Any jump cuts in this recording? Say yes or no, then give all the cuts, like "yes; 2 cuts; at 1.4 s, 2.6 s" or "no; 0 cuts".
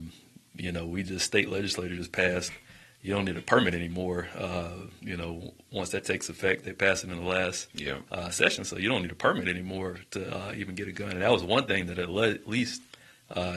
no; 0 cuts